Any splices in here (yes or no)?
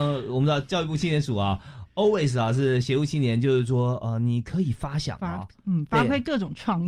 no